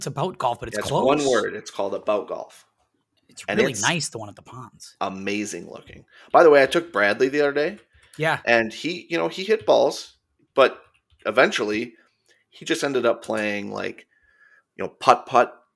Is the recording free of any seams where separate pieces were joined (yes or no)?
yes